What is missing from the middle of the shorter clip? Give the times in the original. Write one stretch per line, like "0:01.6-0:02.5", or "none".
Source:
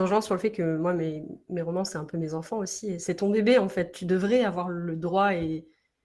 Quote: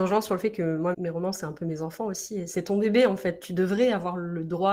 0:00.9-0:01.4